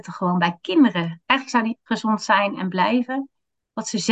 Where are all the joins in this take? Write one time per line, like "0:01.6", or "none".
0:01.9